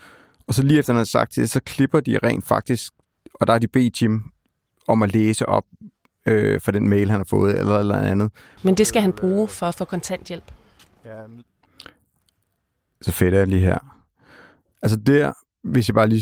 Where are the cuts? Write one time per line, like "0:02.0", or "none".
0:08.6